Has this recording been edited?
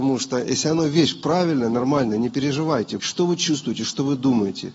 yes; 1 cut; at 3.0 s

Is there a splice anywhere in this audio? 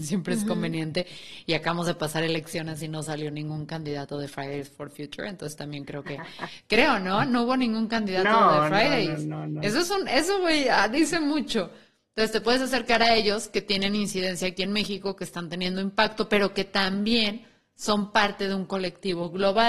no; 0 cuts

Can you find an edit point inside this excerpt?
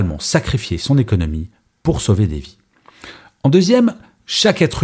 no; 0 cuts

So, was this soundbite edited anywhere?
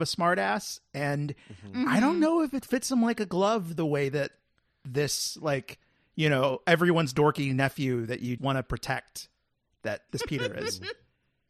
yes; 2 cuts; at 8.4 s, 10.1 s

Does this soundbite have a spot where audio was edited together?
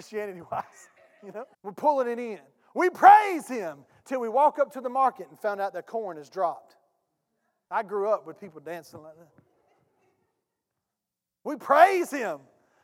yes; 2 cuts; at 1.5 s, 7.7 s

